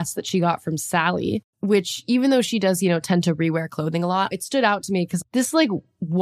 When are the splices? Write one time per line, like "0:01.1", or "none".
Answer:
0:01.5

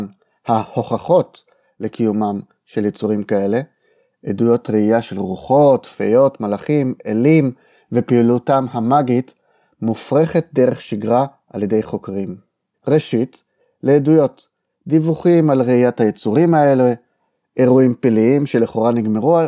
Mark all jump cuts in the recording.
0:12.7

